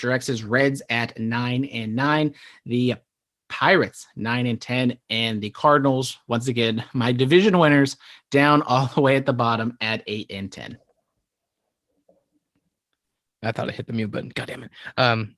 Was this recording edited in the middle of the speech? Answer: no; 0 cuts

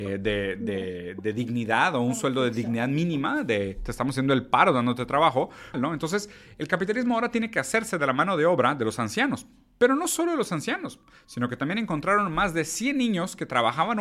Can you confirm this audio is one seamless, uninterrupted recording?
no; 1 cut; at 5.7 s

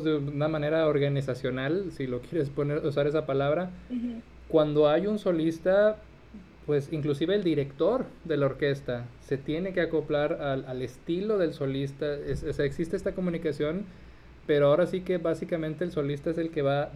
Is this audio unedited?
yes; 0 cuts

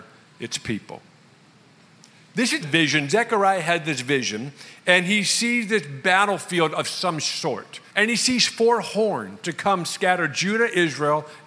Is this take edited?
yes; 2 cuts; at 2.6 s, 7.9 s

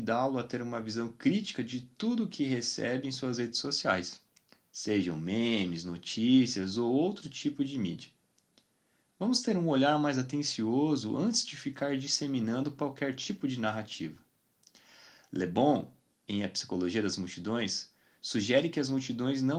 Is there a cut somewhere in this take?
no; 0 cuts

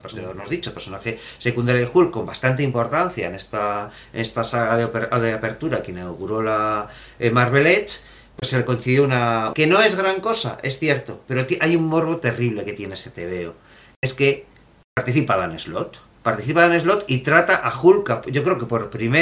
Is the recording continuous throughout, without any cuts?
no; 1 cut; at 9.5 s

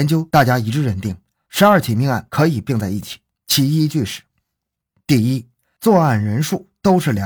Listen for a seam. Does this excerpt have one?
no; 0 cuts

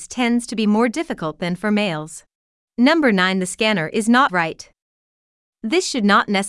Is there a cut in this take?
yes; 2 cuts; at 2.6 s, 4.3 s

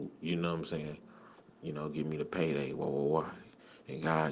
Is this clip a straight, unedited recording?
yes; 0 cuts

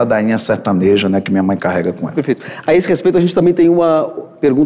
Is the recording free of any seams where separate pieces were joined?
yes; 0 cuts

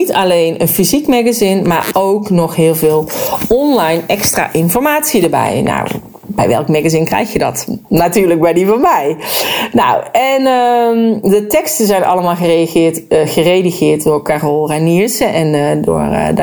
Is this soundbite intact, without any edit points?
yes; 0 cuts

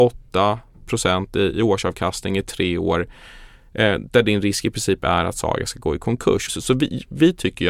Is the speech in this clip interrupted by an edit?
yes; 1 cut; at 6.5 s

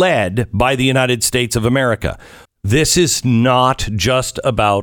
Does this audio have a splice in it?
yes; 1 cut; at 2.4 s

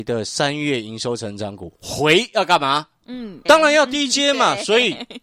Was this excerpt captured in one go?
no; 1 cut; at 3.5 s

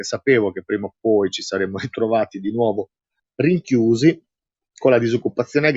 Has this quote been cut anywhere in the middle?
no; 0 cuts

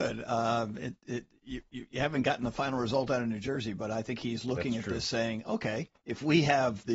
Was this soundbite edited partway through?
no; 0 cuts

